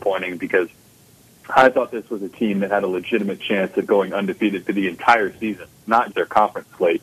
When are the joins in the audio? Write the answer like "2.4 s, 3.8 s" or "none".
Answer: 6.1 s